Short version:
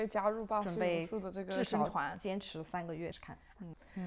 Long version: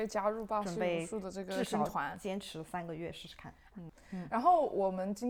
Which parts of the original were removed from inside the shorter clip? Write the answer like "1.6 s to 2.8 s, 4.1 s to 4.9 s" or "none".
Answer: 3.1 s to 3.3 s